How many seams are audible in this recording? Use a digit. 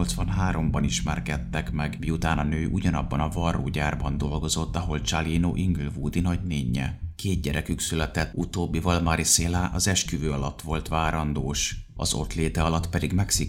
2